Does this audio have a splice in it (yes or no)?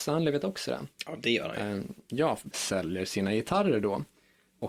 yes